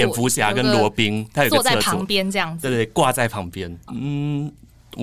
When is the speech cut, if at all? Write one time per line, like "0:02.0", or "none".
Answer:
0:03.9